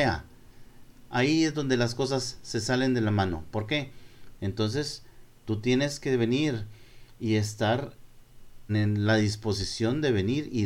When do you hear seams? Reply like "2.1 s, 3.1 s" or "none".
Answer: 4.4 s, 8.7 s